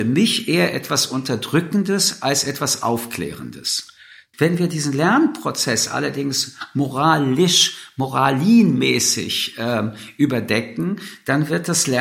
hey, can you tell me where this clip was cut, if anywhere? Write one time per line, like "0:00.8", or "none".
0:04.3